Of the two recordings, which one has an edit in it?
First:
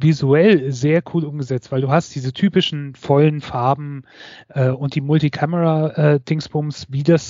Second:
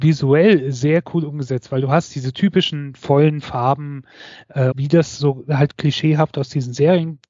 second; 1 cut; at 4.7 s

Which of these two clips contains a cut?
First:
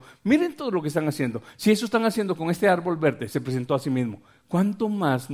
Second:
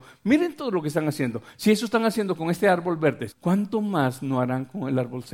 second; 1 cut; at 3.3 s

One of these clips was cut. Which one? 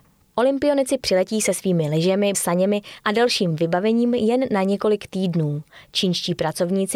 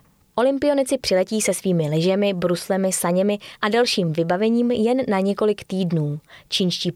first; 1 cut; at 2.3 s

